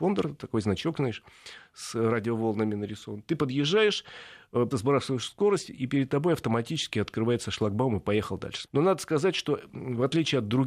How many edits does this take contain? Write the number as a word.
two